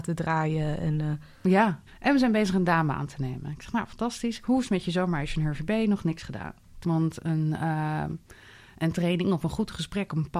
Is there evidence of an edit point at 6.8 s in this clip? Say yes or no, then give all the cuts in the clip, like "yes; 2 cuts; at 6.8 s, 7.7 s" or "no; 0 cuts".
yes; 2 cuts; at 1.9 s, 6.8 s